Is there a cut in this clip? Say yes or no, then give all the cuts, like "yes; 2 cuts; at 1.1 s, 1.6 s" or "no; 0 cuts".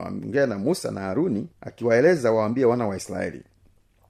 yes; 1 cut; at 1.5 s